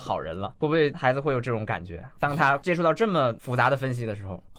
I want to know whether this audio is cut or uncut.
uncut